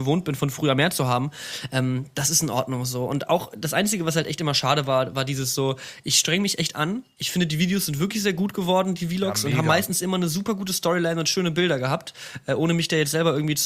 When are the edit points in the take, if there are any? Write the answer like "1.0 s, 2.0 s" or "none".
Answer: none